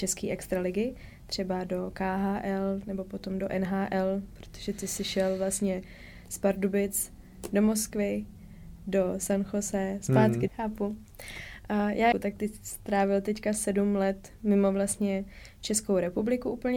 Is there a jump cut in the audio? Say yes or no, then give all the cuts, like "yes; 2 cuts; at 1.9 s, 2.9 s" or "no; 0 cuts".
yes; 2 cuts; at 10.5 s, 12.1 s